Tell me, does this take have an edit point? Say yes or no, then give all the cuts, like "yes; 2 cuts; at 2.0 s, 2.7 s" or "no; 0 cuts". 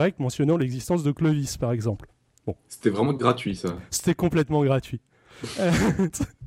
no; 0 cuts